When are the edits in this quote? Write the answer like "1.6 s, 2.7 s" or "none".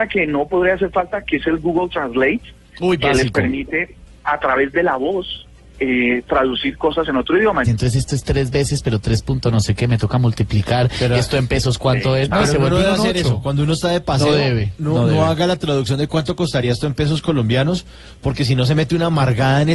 7.6 s